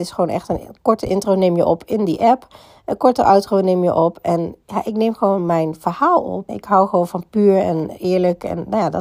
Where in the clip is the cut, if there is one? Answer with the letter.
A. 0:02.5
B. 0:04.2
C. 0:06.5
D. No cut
C